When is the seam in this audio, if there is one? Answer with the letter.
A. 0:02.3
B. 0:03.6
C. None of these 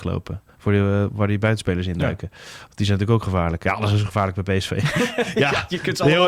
C